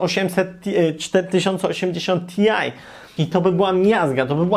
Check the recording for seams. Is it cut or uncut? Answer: cut